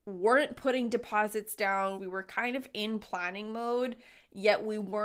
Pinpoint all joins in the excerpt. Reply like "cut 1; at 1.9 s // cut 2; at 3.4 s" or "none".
cut 1; at 2.0 s